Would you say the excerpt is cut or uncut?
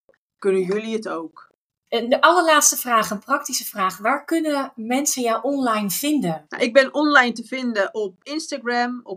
uncut